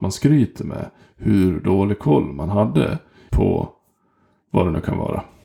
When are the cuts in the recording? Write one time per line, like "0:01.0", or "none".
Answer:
0:03.3